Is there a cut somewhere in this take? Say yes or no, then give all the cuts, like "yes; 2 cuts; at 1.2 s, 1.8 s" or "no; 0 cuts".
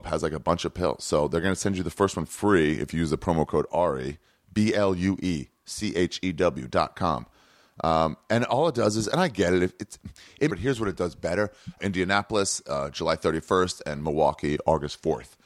yes; 2 cuts; at 10.5 s, 11.8 s